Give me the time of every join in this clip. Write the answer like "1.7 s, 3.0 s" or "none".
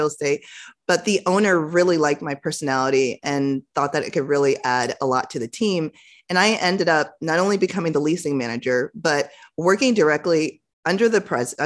none